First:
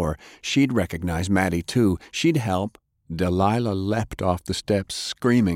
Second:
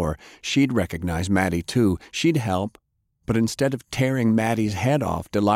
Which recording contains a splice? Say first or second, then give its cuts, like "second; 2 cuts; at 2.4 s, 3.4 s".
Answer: first; 1 cut; at 3.0 s